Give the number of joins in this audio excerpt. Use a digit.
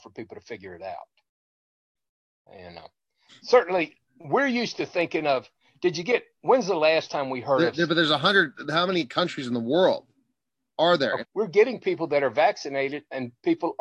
1